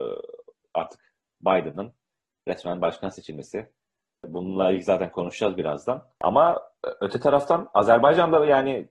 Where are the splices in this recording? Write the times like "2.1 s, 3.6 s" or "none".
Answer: 6.1 s